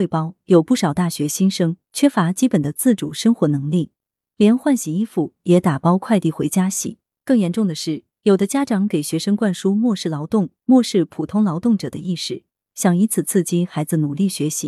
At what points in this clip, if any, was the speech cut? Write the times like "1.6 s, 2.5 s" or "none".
none